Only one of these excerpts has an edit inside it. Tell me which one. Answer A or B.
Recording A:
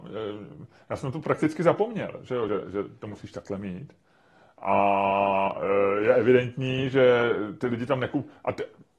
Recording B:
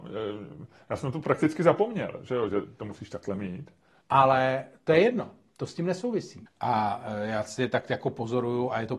B